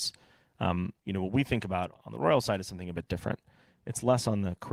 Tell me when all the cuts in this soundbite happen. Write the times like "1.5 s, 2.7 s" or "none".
1.0 s